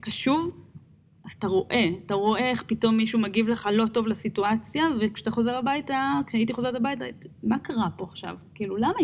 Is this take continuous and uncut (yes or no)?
yes